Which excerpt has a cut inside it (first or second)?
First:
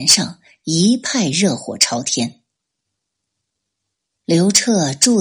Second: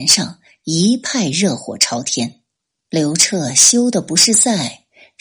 second